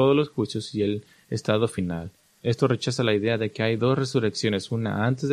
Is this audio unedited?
no; 1 cut; at 2.4 s

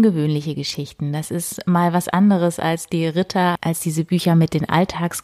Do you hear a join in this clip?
yes; 1 cut; at 3.6 s

